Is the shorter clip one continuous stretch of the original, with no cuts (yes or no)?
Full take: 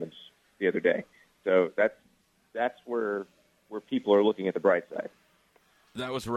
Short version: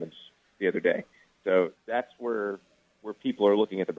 no